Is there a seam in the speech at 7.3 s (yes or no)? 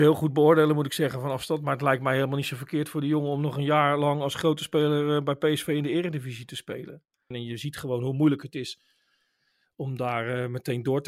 yes